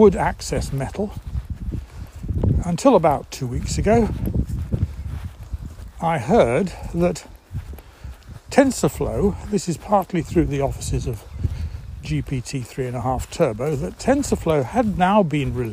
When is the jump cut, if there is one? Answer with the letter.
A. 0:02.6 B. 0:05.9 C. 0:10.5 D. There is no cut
A